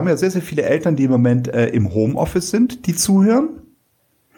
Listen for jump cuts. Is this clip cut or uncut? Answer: uncut